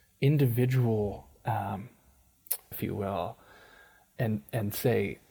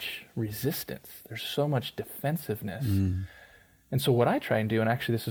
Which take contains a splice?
first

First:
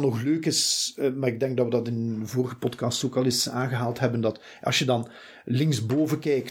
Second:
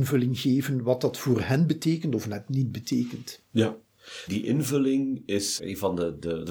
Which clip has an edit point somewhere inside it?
second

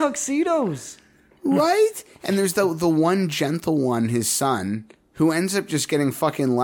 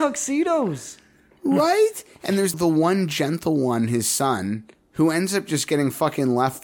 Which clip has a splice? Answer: second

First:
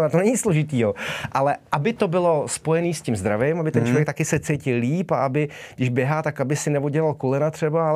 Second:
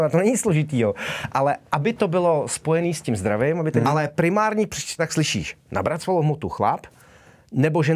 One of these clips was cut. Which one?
second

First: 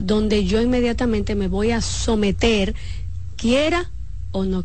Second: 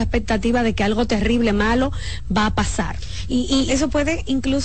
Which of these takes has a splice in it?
second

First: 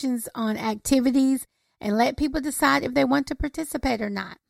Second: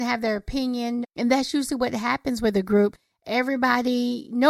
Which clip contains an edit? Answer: second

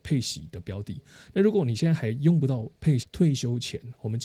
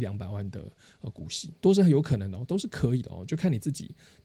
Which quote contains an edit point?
first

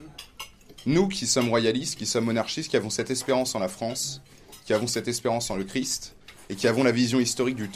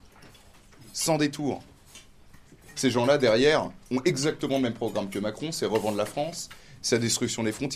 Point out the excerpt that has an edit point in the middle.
second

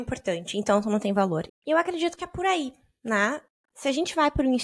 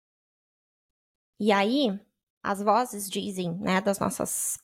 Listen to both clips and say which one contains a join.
first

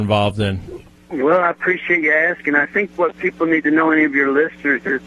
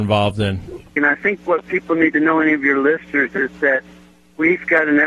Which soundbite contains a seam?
second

